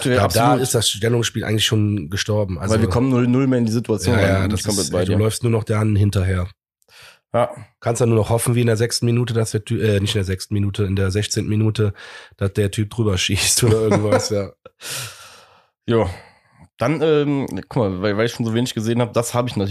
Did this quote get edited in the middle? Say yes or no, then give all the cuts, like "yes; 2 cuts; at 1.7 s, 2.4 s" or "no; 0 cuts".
no; 0 cuts